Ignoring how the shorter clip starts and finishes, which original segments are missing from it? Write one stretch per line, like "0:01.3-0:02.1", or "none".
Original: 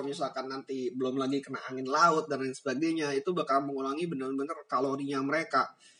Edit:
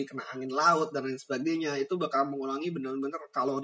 none